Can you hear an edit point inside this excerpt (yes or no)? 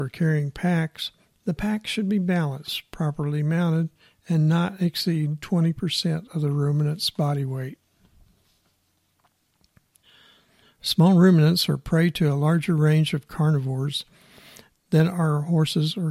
no